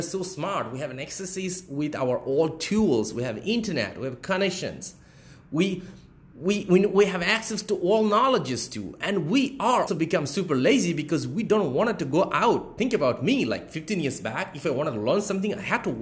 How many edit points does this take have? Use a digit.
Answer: 1